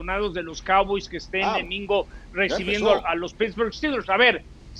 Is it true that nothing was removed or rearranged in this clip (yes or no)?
no